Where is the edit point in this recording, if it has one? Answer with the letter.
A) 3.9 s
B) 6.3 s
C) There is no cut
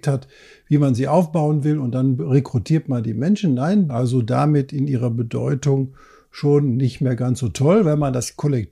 A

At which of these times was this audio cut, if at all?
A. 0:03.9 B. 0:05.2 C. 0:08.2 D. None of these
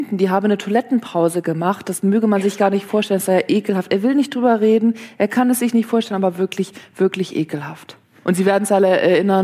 C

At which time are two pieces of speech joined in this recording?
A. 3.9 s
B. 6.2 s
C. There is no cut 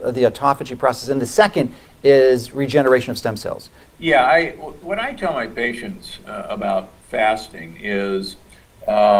A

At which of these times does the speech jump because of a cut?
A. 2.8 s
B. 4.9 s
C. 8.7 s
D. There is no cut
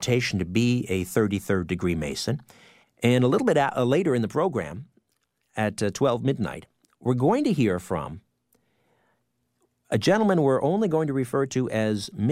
A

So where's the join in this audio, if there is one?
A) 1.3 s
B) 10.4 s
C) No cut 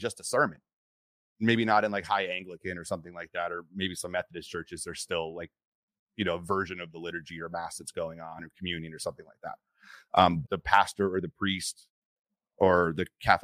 B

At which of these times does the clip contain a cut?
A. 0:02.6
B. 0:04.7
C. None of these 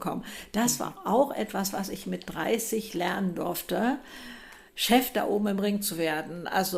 B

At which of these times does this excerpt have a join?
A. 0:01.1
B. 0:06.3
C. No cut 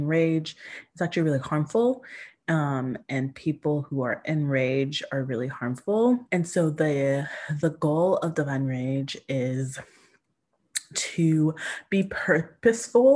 B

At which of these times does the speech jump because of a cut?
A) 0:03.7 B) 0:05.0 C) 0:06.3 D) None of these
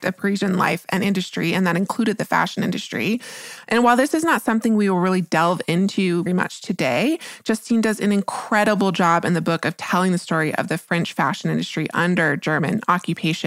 C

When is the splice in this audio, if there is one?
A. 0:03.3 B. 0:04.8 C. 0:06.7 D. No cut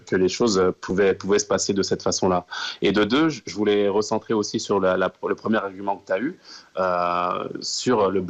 D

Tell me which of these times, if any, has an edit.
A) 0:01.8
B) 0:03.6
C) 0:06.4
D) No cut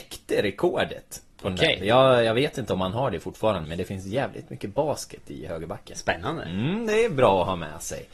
B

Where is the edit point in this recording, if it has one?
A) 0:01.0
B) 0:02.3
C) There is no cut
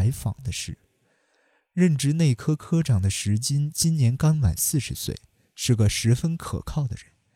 C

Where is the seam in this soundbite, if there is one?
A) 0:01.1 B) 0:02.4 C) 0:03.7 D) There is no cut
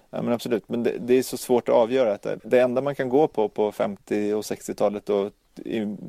B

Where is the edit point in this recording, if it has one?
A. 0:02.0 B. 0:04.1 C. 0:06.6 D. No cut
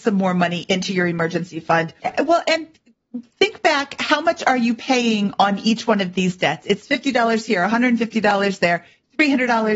A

